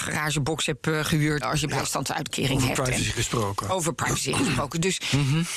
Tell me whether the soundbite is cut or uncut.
cut